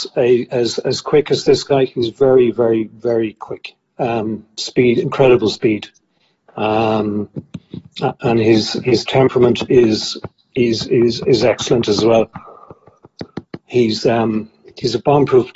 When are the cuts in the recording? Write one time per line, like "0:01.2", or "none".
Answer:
none